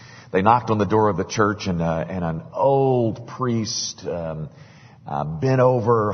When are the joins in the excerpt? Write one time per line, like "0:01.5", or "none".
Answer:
none